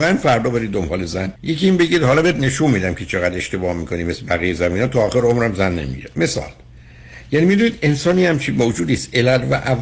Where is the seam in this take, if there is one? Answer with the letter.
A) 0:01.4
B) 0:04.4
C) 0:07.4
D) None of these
A